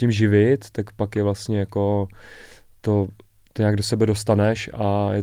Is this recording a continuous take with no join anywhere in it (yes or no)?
yes